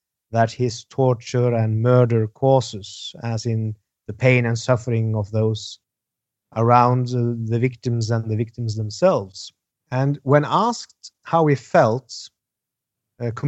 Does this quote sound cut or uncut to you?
cut